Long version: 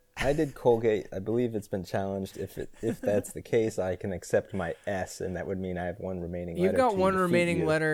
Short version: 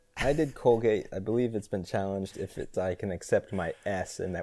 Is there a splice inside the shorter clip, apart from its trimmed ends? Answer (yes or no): yes